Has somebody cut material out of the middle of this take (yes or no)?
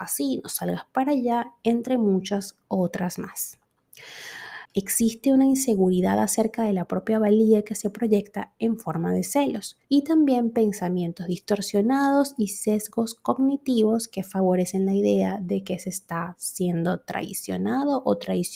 yes